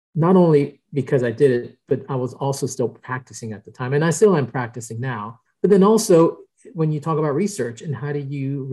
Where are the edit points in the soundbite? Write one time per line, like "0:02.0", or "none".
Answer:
0:05.5